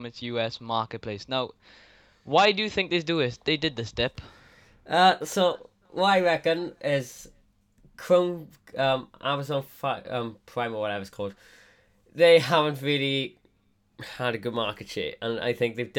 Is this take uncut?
yes; 0 cuts

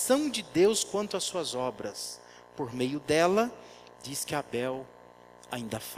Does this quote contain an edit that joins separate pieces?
yes; 1 cut; at 3.9 s

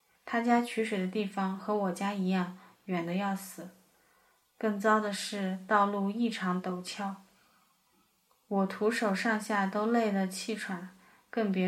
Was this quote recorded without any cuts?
yes; 0 cuts

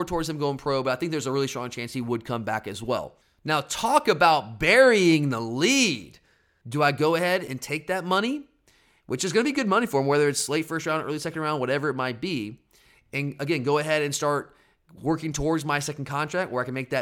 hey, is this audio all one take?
no; 1 cut; at 6.6 s

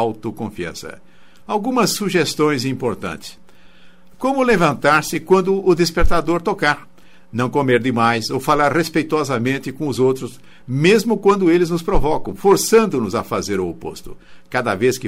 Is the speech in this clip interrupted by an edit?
yes; 1 cut; at 4.1 s

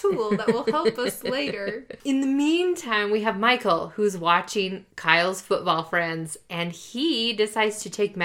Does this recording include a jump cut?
no; 0 cuts

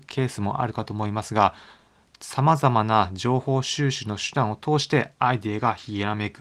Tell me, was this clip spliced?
no; 0 cuts

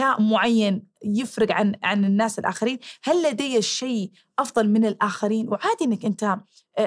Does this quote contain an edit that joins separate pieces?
no; 0 cuts

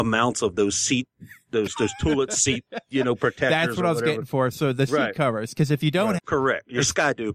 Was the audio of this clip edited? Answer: yes; 1 cut; at 6.2 s

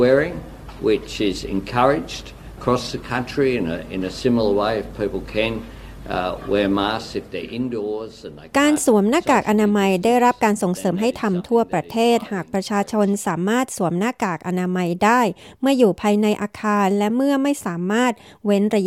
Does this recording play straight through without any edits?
no; 1 cut; at 2.6 s

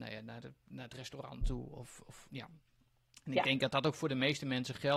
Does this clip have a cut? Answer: yes; 1 cut; at 2.3 s

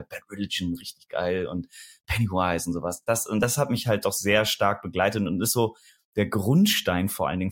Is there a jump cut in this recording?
no; 0 cuts

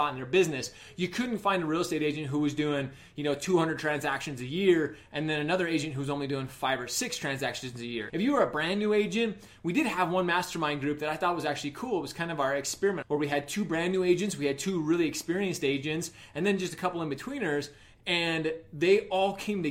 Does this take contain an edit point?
yes; 2 cuts; at 8.1 s, 13.0 s

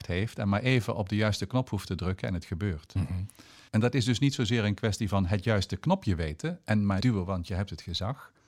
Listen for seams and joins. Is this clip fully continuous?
no; 2 cuts; at 3.7 s, 7.0 s

